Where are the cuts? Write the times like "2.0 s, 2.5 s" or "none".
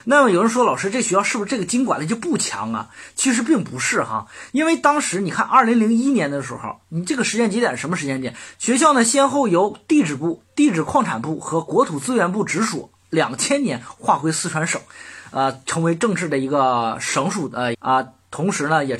8.5 s, 17.7 s